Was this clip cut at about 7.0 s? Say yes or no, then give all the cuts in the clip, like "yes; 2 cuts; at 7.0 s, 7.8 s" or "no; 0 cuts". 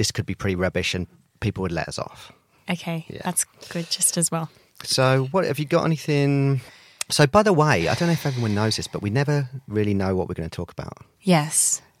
no; 0 cuts